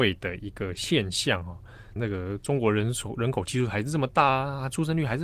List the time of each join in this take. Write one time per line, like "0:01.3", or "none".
0:02.0

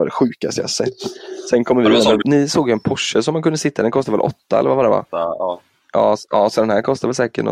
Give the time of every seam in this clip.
0:02.2

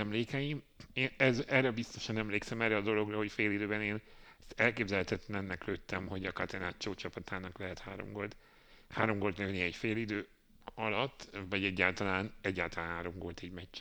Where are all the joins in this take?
none

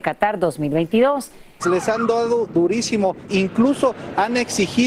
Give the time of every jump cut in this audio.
0:01.6
0:03.3

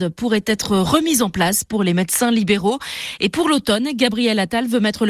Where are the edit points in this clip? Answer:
none

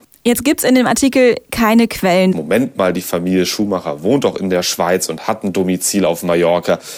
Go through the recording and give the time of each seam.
0:02.3

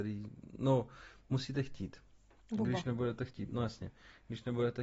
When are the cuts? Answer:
none

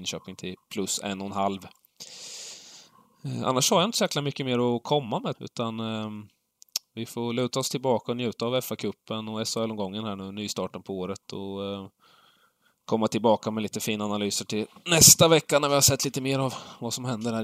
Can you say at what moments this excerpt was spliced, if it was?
0:05.3

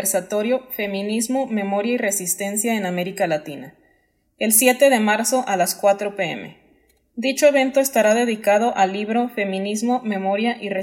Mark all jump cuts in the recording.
none

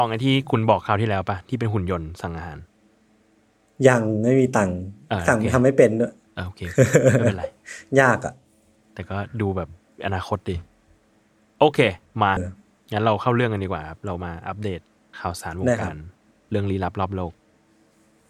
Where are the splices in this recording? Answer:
0:12.4

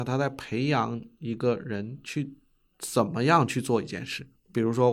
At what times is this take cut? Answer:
none

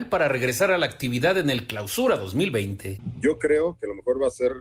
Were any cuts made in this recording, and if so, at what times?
none

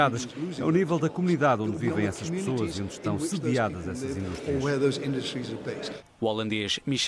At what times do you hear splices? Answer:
0:06.1

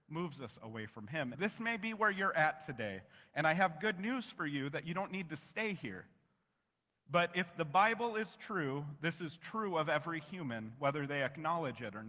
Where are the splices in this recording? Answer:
0:01.3

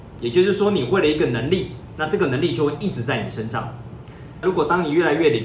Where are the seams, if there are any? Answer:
0:04.4

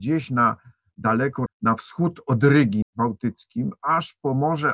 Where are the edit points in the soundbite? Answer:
0:01.5
0:02.8

